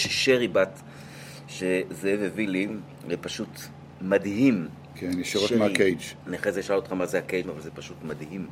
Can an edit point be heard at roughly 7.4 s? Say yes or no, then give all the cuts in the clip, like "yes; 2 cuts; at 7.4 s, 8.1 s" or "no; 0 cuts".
yes; 2 cuts; at 6.2 s, 7.4 s